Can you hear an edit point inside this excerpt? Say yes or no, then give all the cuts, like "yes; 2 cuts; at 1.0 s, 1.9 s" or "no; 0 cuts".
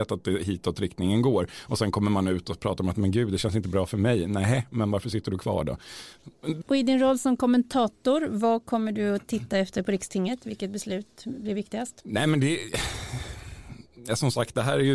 yes; 1 cut; at 6.6 s